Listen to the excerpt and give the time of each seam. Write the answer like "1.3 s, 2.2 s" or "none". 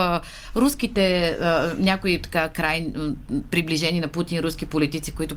none